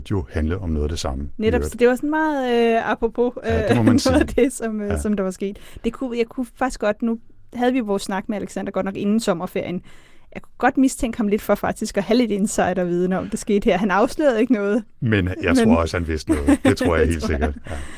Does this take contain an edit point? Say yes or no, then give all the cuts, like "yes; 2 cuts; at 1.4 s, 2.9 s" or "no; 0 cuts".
no; 0 cuts